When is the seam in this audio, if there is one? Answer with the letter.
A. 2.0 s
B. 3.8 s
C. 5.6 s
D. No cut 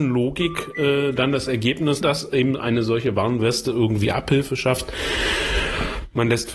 A